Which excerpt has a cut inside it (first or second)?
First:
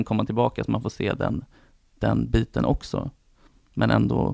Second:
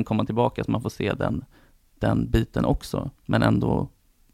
second